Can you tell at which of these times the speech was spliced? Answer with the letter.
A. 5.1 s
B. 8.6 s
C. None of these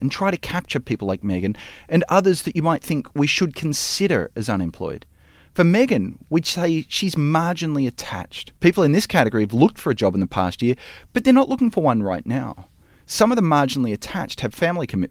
B